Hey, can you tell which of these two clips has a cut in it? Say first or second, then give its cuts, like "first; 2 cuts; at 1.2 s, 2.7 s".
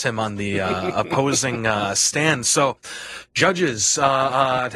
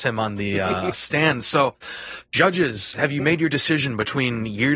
second; 2 cuts; at 0.9 s, 2.9 s